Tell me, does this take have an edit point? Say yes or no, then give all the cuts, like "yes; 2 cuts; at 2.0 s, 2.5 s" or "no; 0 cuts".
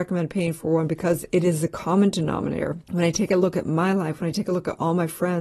yes; 1 cut; at 2.8 s